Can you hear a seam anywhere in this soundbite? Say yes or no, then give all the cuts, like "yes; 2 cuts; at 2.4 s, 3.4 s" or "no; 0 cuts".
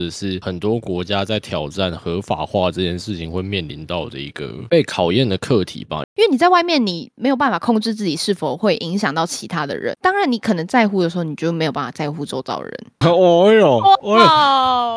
yes; 3 cuts; at 6.0 s, 10.0 s, 13.0 s